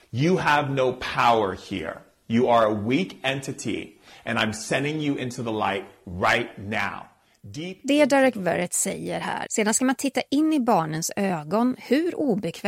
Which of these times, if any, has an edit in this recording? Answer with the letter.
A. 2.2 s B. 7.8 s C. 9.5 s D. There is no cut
C